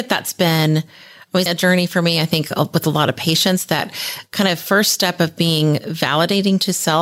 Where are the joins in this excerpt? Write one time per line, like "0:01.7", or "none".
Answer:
0:01.5